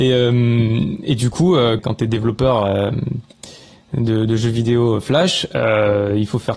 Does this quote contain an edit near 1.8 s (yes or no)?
yes